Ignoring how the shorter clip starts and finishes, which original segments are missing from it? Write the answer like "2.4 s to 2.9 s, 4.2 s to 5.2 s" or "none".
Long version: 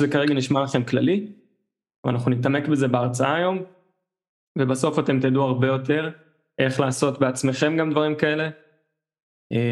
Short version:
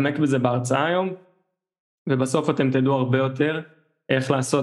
none